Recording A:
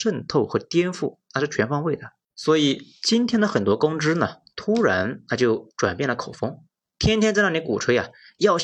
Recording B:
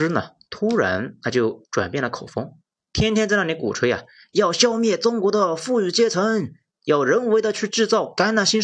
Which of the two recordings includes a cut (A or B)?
A